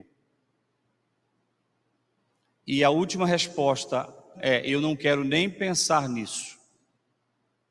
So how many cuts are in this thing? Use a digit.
1